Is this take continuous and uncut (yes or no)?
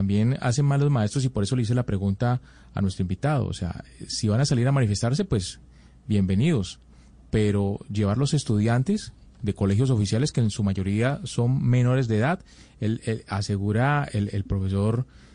yes